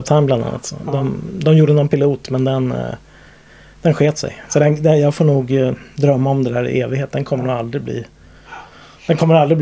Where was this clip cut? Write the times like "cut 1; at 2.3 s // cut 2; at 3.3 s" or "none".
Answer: none